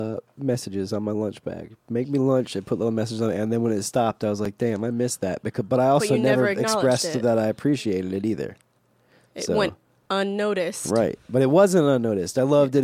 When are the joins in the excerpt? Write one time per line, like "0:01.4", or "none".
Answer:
none